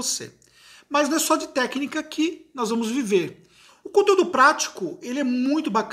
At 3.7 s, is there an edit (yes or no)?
yes